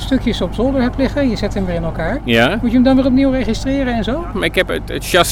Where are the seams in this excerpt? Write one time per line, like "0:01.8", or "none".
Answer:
0:04.3